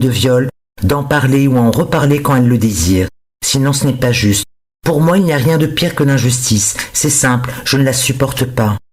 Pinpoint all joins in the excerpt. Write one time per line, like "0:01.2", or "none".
none